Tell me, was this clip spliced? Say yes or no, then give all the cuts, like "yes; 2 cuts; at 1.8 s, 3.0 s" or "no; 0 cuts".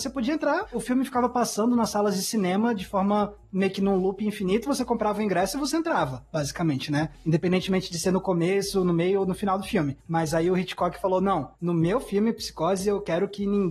no; 0 cuts